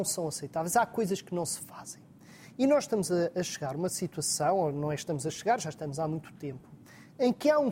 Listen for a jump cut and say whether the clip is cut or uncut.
uncut